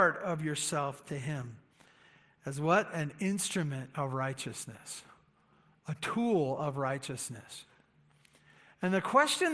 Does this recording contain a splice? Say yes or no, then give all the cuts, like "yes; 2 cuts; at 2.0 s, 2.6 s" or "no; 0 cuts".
no; 0 cuts